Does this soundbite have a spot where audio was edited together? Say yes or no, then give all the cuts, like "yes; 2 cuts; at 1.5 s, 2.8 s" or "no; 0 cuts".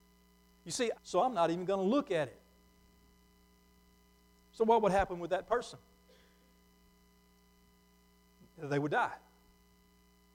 yes; 1 cut; at 0.9 s